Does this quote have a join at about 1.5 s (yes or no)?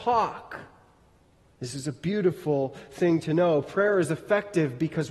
yes